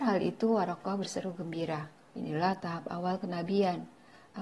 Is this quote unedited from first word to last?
no; 1 cut; at 2.1 s

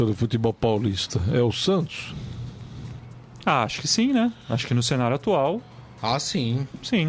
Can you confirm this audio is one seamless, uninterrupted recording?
yes; 0 cuts

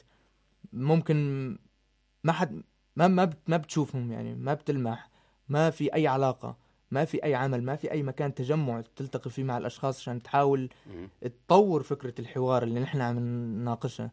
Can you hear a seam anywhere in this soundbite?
no; 0 cuts

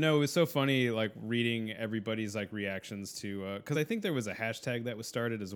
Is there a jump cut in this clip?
no; 0 cuts

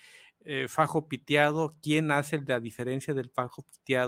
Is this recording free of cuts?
yes; 0 cuts

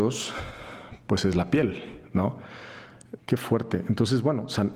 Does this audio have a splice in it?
yes; 1 cut; at 3.2 s

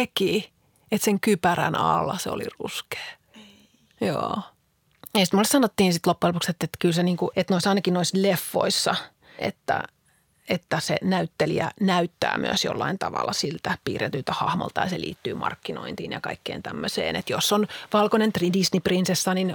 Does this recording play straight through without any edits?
no; 2 cuts; at 7.3 s, 9.4 s

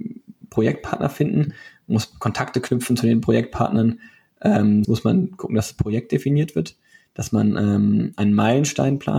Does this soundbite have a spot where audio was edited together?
yes; 1 cut; at 4.8 s

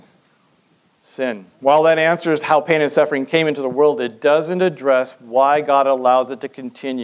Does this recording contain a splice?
yes; 1 cut; at 1.5 s

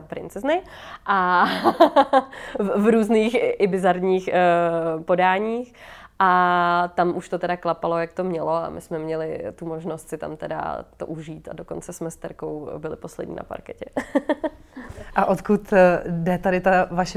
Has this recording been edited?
no; 0 cuts

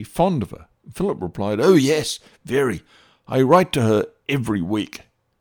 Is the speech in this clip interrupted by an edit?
no; 0 cuts

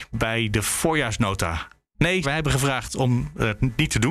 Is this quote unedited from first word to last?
no; 1 cut; at 2.2 s

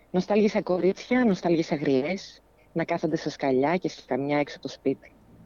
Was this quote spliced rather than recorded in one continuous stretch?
no; 0 cuts

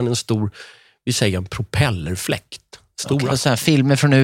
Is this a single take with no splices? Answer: no; 1 cut; at 3.3 s

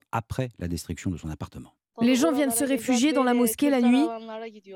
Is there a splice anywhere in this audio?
yes; 1 cut; at 1.9 s

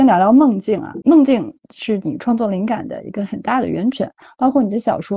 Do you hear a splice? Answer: yes; 1 cut; at 1.0 s

